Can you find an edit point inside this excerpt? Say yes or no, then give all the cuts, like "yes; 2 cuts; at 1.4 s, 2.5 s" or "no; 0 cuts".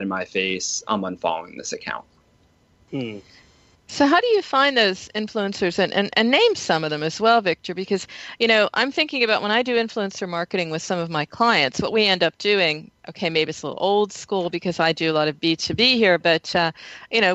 no; 0 cuts